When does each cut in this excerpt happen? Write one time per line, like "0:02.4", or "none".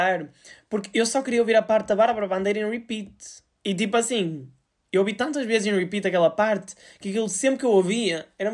none